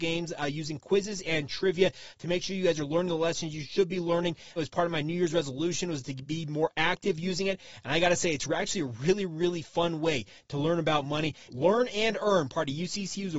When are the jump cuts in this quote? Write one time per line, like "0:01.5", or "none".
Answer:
0:04.6
0:11.5